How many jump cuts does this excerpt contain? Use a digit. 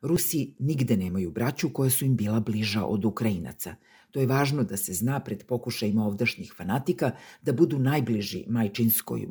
0